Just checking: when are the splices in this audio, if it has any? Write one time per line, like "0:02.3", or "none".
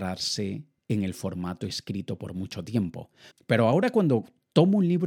0:03.3